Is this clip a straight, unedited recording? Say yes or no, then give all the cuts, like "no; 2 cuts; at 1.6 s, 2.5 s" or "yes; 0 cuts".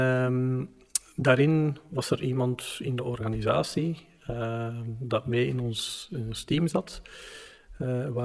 yes; 0 cuts